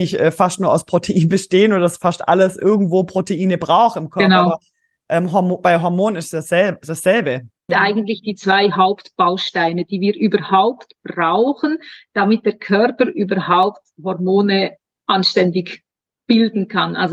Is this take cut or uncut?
cut